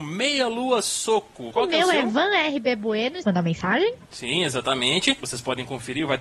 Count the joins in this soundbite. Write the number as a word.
three